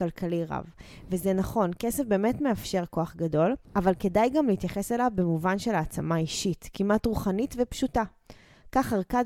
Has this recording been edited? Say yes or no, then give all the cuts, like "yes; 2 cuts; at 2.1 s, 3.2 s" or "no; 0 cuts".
no; 0 cuts